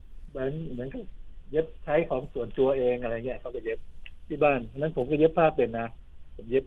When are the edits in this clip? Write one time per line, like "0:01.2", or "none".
none

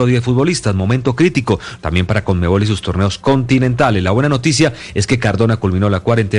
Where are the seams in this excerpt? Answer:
0:01.8

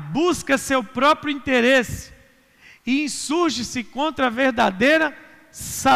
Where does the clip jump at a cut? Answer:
none

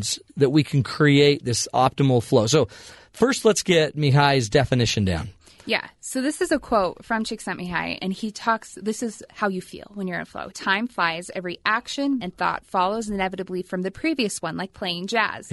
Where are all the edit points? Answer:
0:08.1
0:10.5
0:12.2

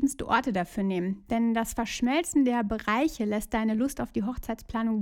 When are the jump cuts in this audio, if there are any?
none

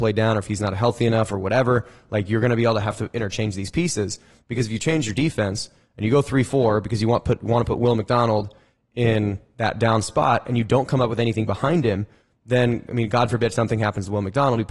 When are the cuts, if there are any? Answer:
0:04.4

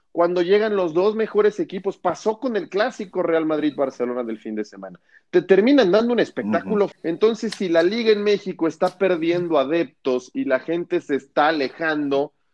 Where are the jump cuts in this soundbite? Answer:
0:06.9

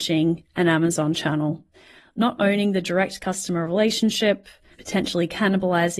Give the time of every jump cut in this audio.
0:04.7

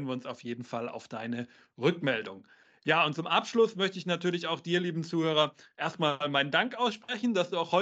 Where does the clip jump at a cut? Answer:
none

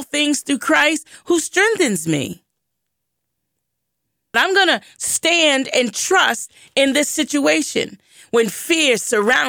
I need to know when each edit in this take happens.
0:04.3

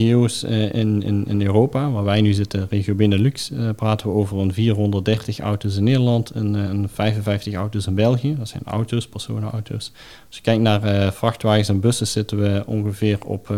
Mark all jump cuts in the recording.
none

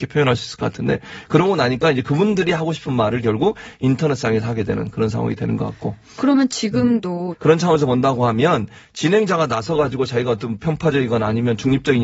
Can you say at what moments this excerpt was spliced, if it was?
0:07.3

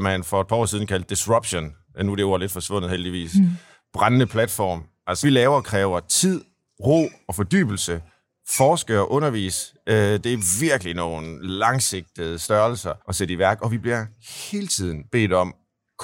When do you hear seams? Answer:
0:05.2
0:13.0

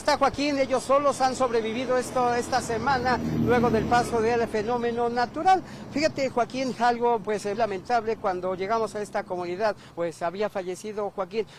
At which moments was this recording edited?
0:07.5
0:09.9

